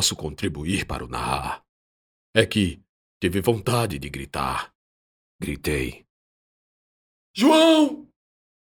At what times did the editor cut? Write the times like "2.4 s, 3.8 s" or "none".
3.1 s, 5.3 s